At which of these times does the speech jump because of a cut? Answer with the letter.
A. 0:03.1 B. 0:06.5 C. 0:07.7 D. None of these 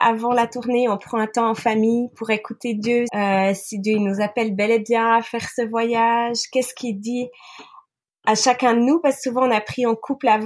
A